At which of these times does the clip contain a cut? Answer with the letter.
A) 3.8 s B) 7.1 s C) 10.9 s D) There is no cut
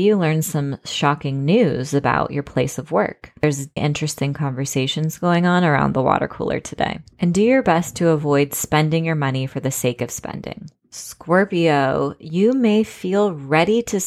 A